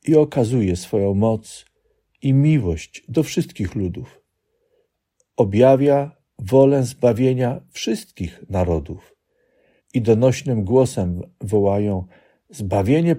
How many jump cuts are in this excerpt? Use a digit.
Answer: 1